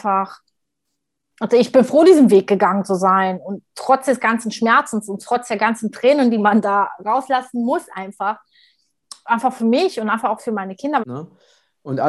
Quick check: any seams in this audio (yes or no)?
yes